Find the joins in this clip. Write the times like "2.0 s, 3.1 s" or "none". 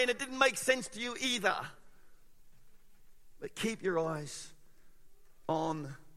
none